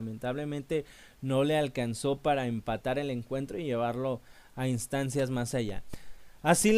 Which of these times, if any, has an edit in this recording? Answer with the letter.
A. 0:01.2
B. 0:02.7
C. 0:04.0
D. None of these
D